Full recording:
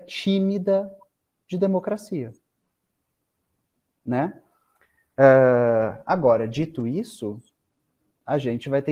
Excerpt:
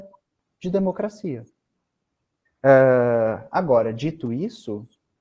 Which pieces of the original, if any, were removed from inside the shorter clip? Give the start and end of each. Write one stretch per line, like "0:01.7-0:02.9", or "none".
0:03.3-0:05.0